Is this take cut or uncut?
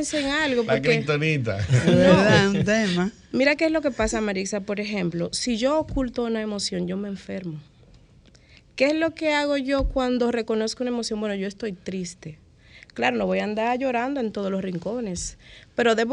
uncut